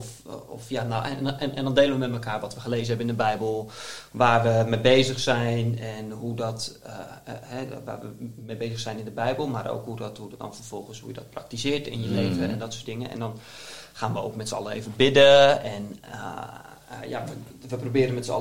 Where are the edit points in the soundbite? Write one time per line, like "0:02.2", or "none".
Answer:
none